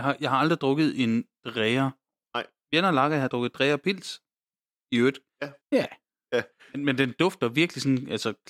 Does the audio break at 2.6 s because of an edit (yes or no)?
no